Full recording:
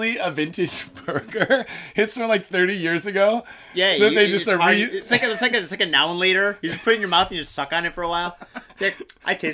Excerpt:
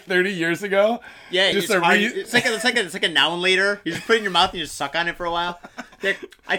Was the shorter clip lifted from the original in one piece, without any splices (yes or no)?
no